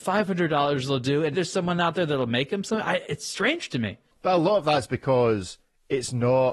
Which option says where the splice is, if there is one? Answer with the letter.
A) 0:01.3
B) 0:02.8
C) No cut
A